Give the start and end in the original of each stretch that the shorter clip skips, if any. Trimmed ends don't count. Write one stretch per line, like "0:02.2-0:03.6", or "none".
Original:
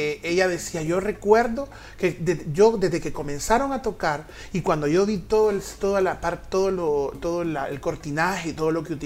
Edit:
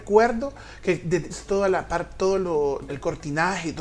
0:02.5-0:05.6
0:07.2-0:07.7